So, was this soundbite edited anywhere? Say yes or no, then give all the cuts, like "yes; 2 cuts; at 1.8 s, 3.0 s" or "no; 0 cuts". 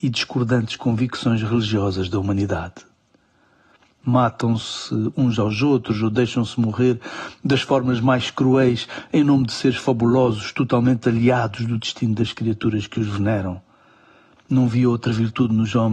no; 0 cuts